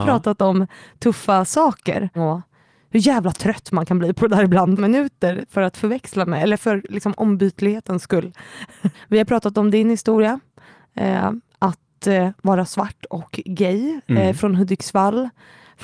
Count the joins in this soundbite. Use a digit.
3